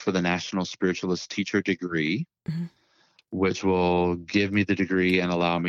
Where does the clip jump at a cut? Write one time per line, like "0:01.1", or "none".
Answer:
0:02.4